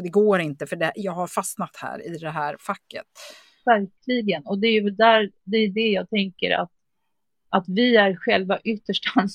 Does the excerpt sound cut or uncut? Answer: uncut